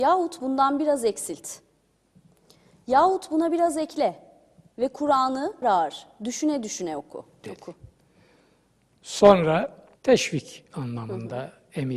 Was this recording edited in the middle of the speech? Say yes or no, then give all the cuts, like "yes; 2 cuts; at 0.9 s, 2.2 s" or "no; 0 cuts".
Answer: yes; 3 cuts; at 5.6 s, 7.4 s, 10.0 s